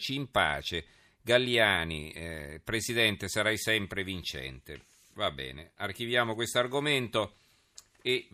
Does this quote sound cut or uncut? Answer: uncut